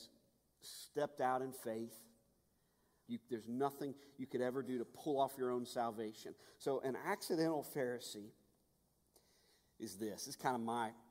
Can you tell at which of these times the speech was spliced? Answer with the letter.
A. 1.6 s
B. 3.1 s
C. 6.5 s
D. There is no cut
B